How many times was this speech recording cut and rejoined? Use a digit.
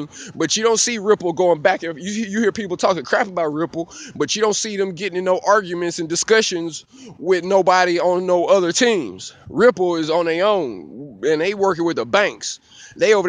0